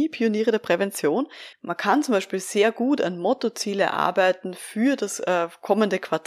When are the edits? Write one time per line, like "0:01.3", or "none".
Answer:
0:01.5

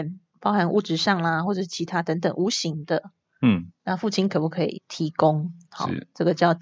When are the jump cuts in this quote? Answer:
none

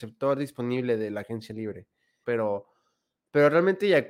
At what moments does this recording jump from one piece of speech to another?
0:02.2

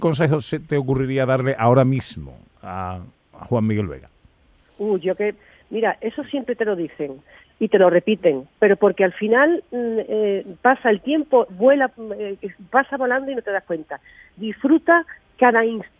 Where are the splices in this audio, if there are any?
none

